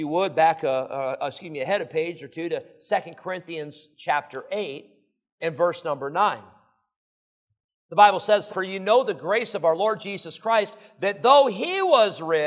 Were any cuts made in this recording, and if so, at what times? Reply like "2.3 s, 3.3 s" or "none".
8.5 s

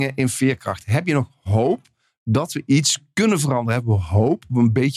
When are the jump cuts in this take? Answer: none

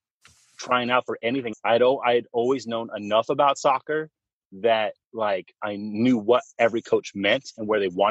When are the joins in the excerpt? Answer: 1.5 s, 5.6 s

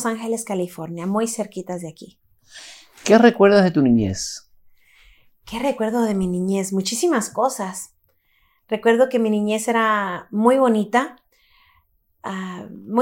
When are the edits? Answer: none

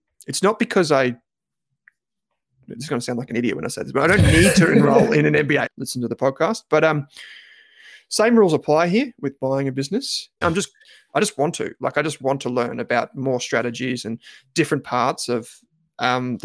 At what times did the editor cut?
5.7 s, 10.4 s

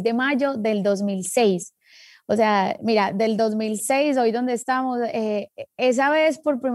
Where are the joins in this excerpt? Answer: none

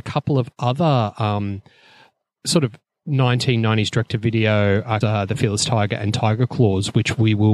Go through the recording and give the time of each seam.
5.0 s

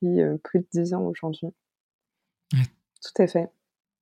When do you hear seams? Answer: 2.6 s

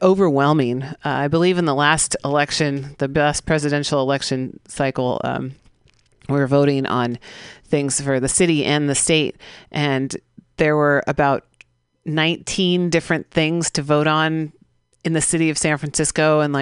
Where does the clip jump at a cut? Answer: none

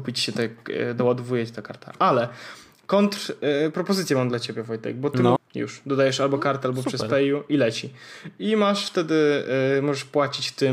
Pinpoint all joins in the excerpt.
5.4 s

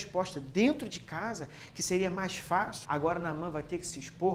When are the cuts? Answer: 2.8 s

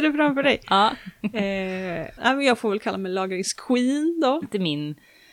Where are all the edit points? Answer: 2.2 s, 4.4 s

